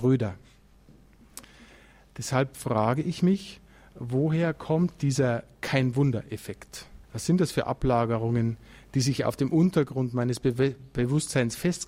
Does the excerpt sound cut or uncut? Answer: cut